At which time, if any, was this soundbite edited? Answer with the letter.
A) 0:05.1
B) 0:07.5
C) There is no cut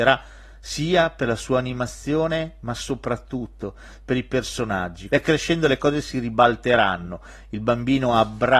A